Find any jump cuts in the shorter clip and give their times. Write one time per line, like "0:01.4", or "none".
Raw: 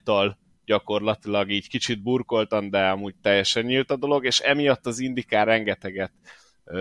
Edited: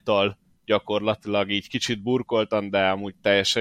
none